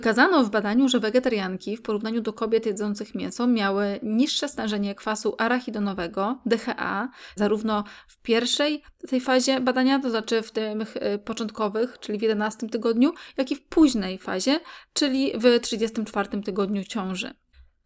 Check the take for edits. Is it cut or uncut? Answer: cut